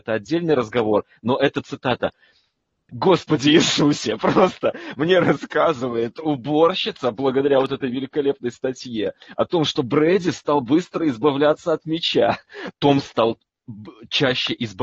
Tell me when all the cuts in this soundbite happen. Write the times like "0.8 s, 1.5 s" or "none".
2.9 s, 12.7 s